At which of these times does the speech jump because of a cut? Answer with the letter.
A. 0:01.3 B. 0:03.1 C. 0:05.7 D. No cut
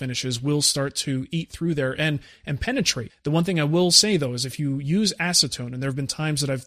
B